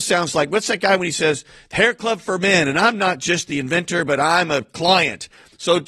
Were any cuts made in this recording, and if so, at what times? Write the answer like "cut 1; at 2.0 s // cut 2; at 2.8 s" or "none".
none